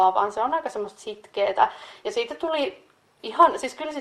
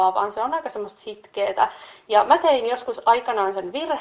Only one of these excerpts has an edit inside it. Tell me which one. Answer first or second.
first